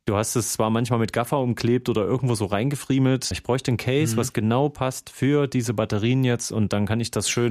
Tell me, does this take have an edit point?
yes; 1 cut; at 3.3 s

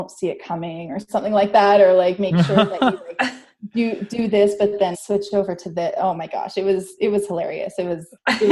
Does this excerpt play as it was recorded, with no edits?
no; 1 cut; at 4.9 s

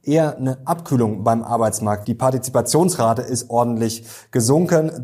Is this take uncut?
no; 1 cut; at 2.0 s

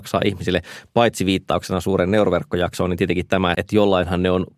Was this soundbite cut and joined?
yes; 1 cut; at 3.5 s

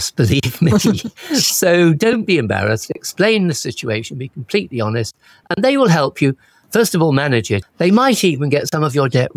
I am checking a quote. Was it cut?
yes; 1 cut; at 7.6 s

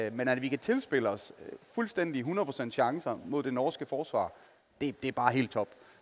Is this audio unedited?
yes; 0 cuts

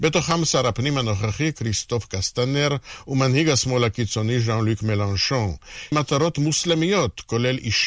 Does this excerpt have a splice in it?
yes; 1 cut; at 5.9 s

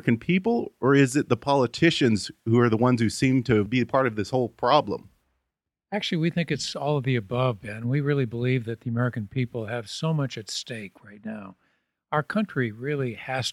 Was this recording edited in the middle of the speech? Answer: no; 0 cuts

